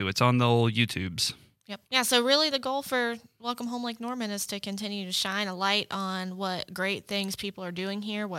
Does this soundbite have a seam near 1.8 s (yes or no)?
yes